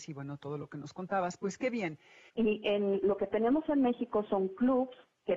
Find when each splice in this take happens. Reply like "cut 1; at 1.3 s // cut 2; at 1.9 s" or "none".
cut 1; at 2.3 s